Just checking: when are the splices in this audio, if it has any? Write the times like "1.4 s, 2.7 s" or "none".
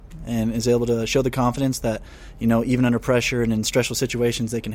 none